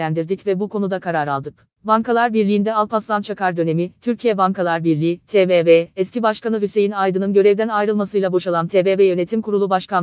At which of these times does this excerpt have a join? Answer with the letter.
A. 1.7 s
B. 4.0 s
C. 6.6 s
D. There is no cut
D